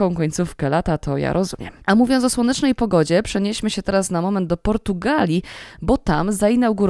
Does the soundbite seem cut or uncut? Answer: cut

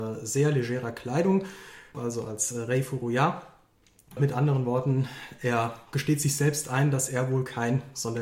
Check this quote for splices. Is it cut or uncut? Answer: cut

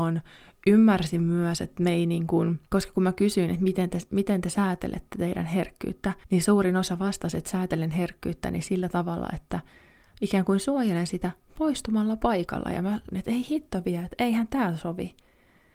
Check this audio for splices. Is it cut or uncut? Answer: cut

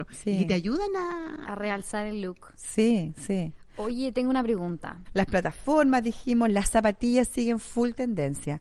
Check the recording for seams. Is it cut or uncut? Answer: cut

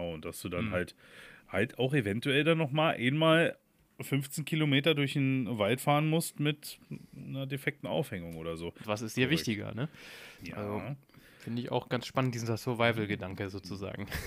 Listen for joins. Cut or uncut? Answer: cut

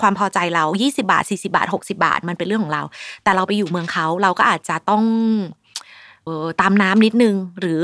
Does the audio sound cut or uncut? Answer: cut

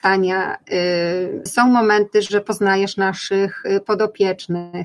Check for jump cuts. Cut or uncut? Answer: cut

